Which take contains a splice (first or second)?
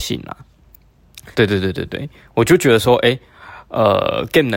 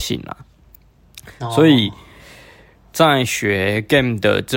first